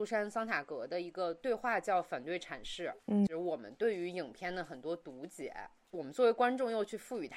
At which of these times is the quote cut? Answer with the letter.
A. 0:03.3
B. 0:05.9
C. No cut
A